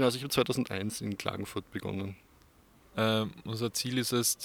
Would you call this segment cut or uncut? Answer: cut